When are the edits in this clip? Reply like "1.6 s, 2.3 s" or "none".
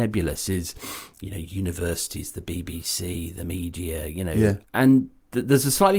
none